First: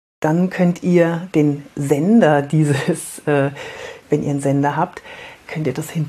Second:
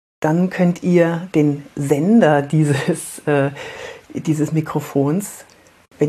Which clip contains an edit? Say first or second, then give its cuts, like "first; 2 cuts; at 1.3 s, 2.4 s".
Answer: first; 1 cut; at 4.0 s